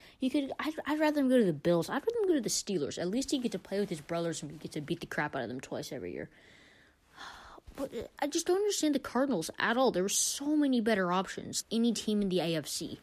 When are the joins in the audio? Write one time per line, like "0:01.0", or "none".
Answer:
0:11.6